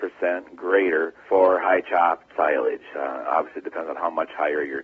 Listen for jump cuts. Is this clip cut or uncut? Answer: cut